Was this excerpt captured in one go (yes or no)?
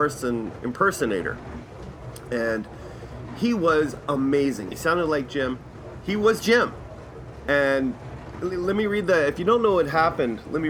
no